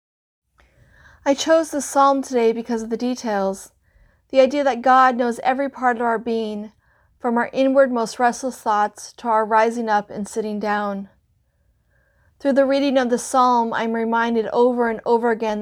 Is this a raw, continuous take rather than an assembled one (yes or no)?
yes